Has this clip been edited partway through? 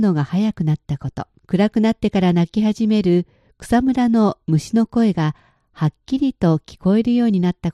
yes; 1 cut; at 1.4 s

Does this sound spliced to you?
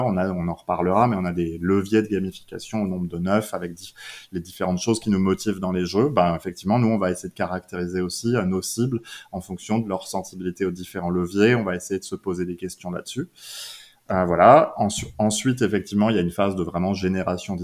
no; 0 cuts

